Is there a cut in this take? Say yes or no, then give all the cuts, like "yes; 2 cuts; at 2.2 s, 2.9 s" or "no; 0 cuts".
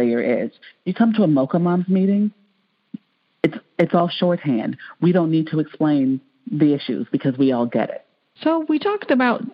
yes; 1 cut; at 8.4 s